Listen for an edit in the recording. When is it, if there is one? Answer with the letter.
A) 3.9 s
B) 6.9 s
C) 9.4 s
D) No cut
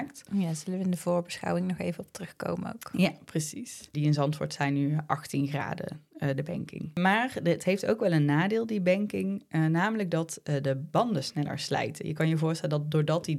A